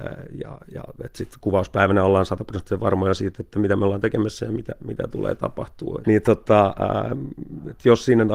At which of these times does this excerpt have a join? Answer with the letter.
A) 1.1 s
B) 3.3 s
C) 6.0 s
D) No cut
C